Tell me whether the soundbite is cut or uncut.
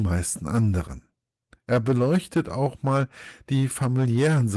uncut